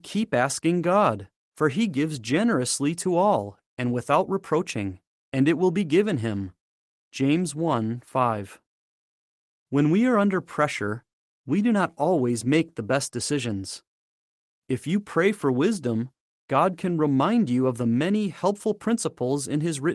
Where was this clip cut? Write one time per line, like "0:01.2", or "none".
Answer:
none